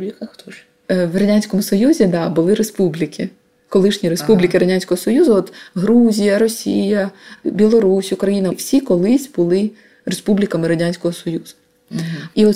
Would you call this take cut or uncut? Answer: uncut